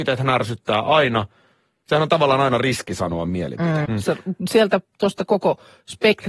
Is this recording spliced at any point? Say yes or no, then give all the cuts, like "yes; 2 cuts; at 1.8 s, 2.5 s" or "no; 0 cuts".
yes; 1 cut; at 3.9 s